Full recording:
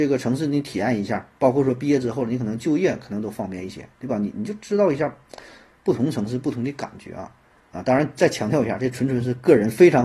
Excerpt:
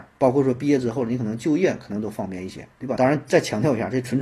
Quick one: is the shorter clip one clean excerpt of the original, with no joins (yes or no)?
no